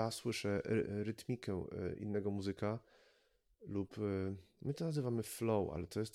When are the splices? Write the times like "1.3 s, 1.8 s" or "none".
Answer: none